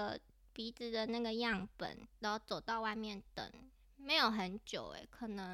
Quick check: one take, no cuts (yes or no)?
no